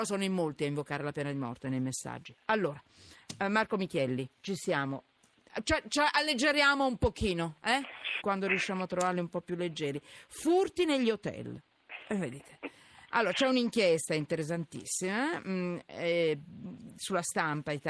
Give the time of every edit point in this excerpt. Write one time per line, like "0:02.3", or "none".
0:04.3
0:08.2